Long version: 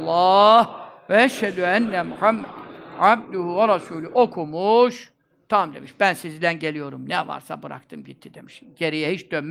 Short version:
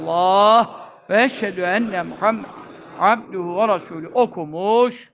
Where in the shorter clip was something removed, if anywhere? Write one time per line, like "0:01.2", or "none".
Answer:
none